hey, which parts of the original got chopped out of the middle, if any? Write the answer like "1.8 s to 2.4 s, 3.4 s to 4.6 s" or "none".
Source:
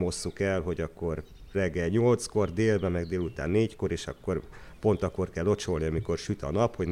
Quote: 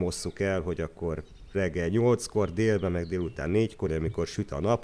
3.9 s to 5.8 s